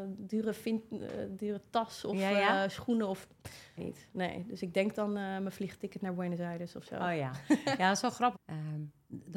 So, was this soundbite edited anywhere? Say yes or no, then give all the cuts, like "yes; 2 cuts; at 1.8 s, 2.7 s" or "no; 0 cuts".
yes; 2 cuts; at 3.8 s, 8.3 s